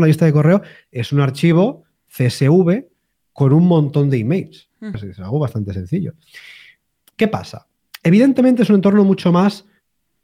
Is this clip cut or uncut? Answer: cut